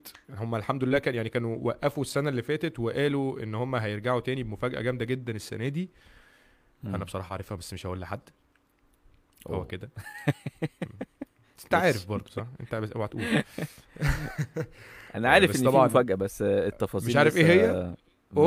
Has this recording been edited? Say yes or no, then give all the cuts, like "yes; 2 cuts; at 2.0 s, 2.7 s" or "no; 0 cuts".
no; 0 cuts